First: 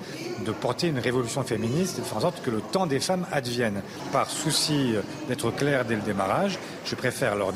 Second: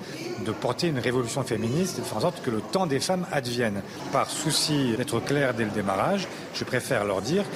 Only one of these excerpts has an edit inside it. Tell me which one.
second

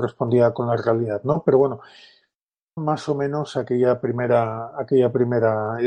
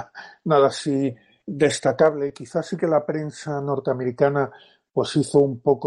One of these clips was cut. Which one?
first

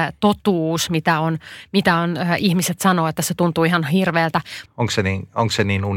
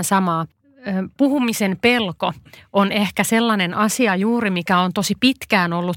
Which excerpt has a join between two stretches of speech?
first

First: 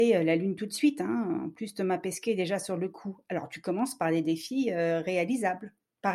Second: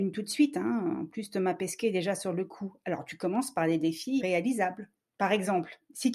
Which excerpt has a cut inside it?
second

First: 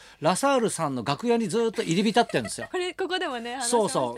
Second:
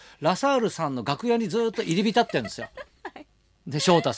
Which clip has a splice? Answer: first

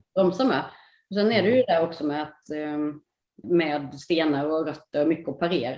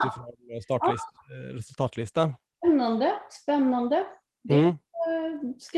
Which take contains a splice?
first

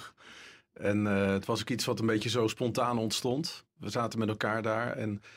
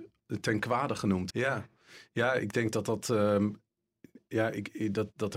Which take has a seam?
second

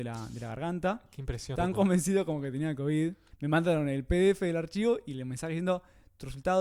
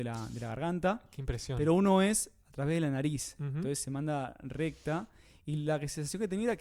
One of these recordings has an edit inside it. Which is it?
first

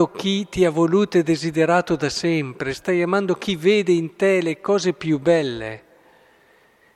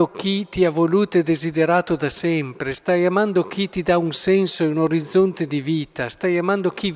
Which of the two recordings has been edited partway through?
first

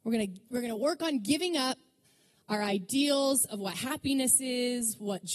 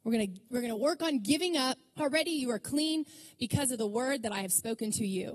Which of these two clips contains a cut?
second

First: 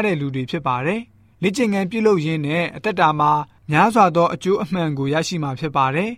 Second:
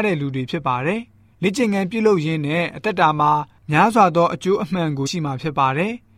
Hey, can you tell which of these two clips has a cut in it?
second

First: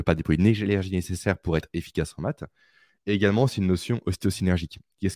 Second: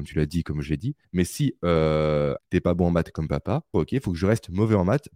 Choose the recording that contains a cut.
second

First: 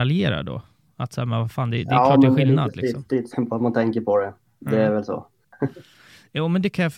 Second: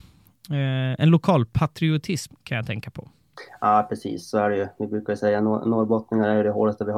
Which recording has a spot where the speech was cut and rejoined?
first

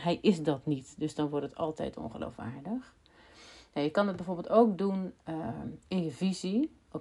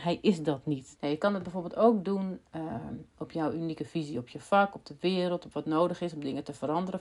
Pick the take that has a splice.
second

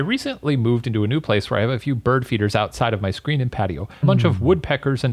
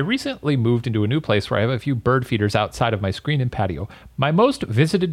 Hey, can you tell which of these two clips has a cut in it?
first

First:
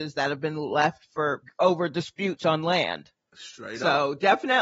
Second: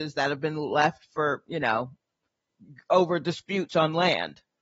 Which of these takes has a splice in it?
first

